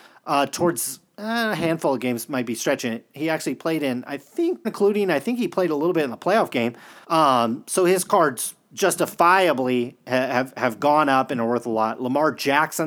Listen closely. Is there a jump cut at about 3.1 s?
no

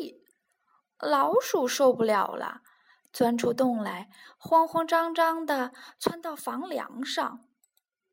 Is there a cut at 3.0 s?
no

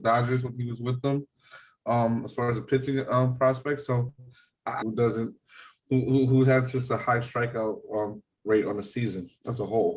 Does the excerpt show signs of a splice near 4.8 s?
yes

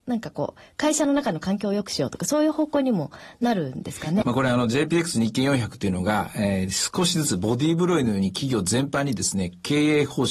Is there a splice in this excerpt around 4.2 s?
yes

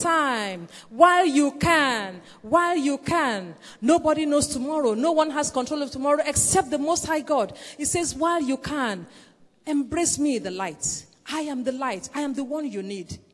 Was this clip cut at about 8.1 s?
no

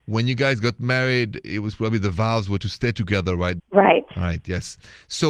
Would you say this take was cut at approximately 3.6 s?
yes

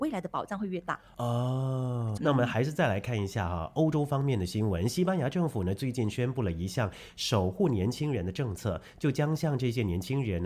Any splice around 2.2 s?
yes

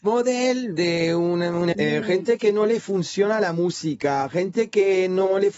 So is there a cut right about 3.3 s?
no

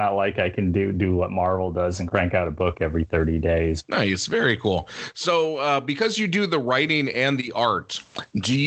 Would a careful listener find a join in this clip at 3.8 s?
yes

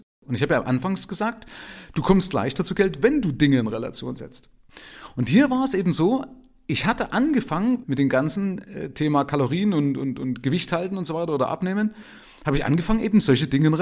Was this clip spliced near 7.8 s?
yes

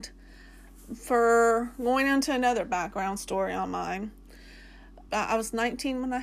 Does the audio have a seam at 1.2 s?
no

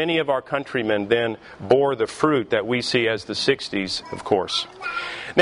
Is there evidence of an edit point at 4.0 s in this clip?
yes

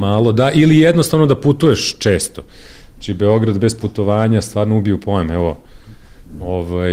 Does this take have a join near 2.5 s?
no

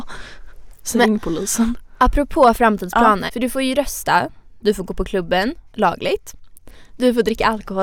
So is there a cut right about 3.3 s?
yes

